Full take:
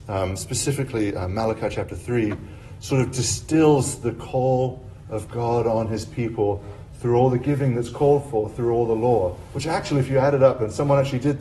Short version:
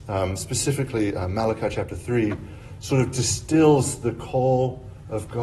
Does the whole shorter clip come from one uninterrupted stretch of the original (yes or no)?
yes